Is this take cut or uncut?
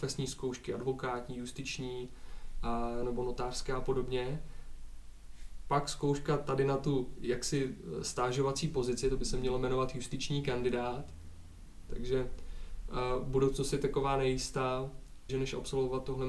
cut